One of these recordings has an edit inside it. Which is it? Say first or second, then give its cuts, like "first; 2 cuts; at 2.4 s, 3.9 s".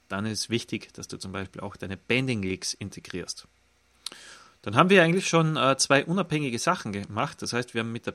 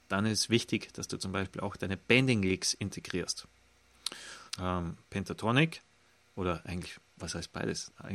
second; 1 cut; at 4.5 s